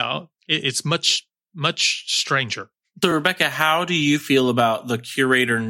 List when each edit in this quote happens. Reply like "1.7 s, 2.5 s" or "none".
none